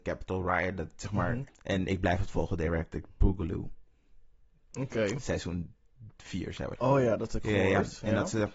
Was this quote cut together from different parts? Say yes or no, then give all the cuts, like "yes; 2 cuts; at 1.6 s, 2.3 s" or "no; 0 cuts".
yes; 2 cuts; at 1.5 s, 6.8 s